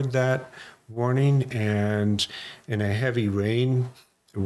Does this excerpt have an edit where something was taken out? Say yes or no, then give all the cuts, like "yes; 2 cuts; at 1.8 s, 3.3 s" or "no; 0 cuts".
no; 0 cuts